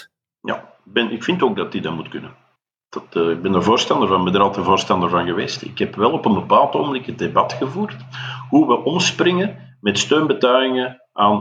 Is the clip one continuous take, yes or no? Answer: yes